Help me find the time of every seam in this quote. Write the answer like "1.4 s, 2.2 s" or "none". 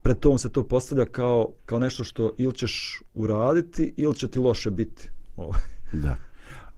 1.6 s

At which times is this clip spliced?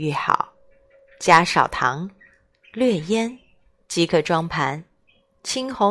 none

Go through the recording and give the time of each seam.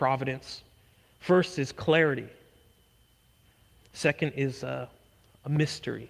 none

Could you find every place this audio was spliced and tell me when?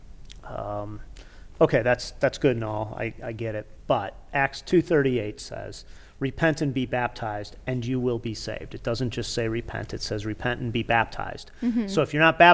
none

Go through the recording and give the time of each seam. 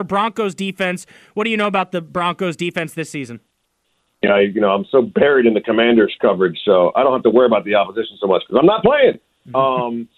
4.2 s

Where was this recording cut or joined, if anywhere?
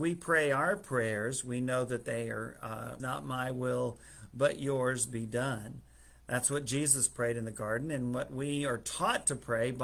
3.0 s

